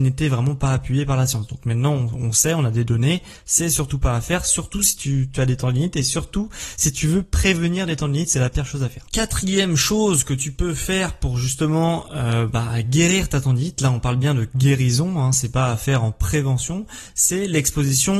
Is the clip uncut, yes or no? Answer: yes